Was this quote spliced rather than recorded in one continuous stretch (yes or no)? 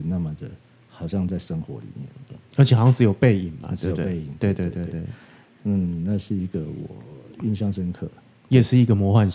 yes